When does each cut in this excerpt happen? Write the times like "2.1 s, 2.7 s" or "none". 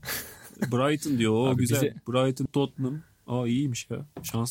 2.5 s